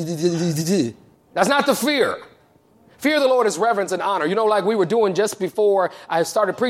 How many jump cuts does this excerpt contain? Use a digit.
0